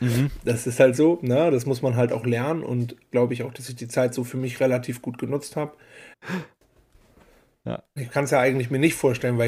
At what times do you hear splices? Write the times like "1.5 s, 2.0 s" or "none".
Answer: 3.1 s, 6.1 s, 8.0 s

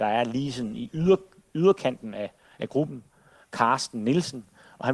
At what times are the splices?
none

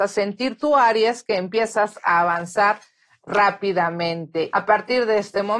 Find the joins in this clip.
4.5 s

